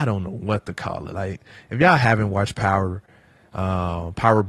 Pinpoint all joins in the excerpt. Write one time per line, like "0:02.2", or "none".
none